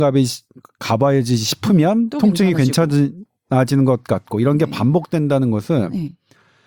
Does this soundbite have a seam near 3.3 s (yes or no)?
no